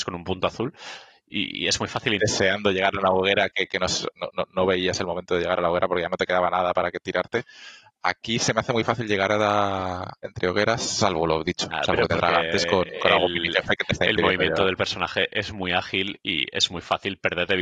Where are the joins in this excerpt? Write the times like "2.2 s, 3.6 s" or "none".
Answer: 2.2 s